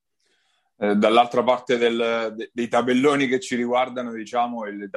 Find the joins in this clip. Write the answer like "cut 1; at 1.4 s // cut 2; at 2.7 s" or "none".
none